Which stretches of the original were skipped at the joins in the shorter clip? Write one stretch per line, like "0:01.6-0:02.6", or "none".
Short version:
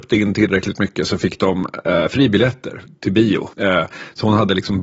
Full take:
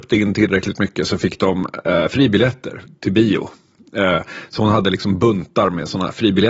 0:03.5-0:03.9